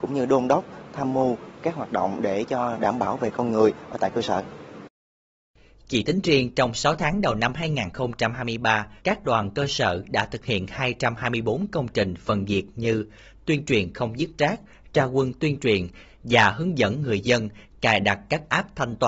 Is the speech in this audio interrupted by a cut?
yes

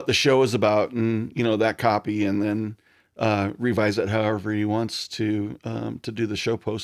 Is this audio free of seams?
no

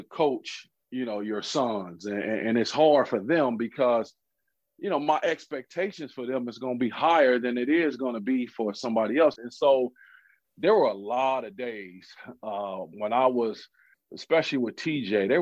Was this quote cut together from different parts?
yes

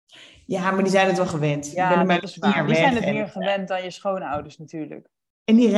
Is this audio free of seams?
yes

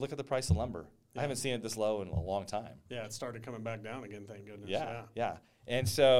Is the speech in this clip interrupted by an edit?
no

